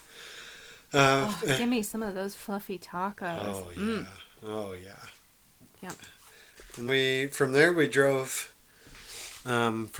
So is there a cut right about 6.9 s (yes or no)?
yes